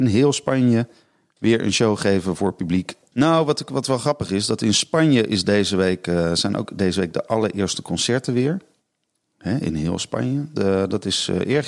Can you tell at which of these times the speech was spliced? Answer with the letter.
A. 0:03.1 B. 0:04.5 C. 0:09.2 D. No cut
A